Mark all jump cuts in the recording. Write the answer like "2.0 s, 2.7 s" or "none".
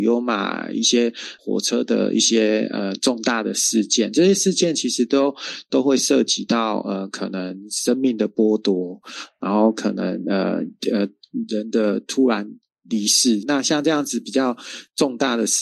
13.4 s